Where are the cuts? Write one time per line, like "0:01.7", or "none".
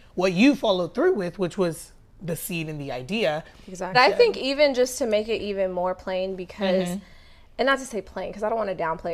0:03.9

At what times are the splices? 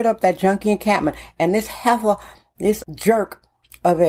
0:02.8

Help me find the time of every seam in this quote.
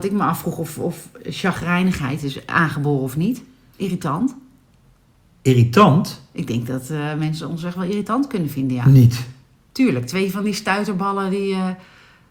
0:03.7

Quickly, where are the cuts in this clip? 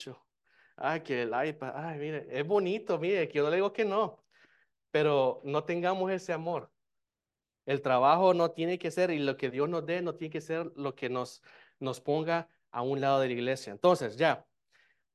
none

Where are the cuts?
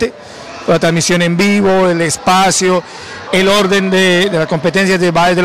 0:03.3

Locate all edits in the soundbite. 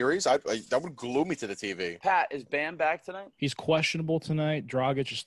0:03.3

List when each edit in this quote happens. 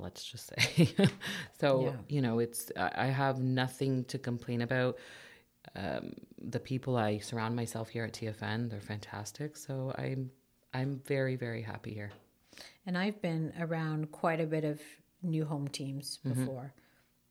none

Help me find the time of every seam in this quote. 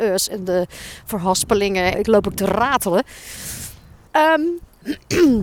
0:01.9
0:04.1

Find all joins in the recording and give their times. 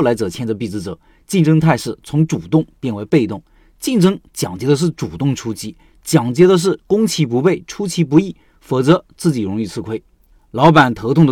0:10.3

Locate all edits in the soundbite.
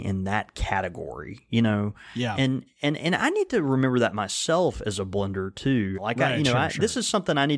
0:05.9

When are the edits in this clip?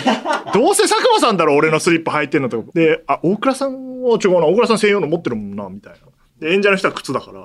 0:02.7

